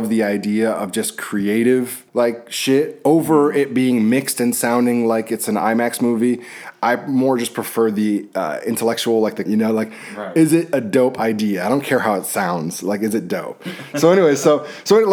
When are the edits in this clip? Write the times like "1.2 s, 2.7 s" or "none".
2.1 s, 9.5 s